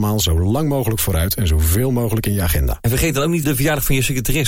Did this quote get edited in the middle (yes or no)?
yes